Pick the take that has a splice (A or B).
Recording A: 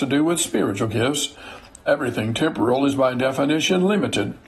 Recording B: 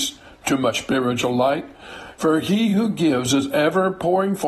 B